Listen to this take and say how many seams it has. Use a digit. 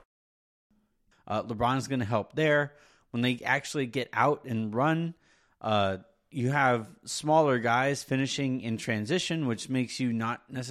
1